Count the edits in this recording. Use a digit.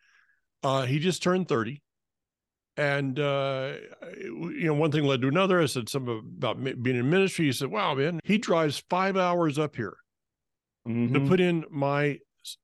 1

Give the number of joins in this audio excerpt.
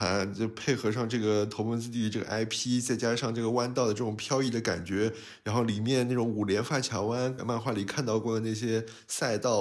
1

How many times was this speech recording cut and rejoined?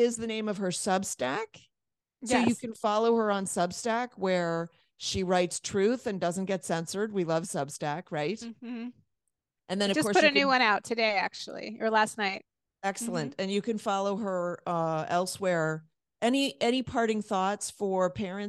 1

